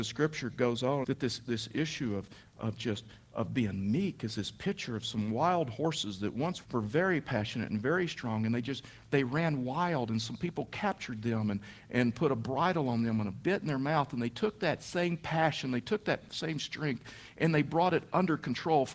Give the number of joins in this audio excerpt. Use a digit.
2